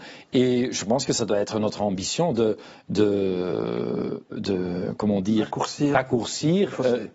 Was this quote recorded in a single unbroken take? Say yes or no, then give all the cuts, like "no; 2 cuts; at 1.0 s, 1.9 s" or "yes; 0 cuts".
yes; 0 cuts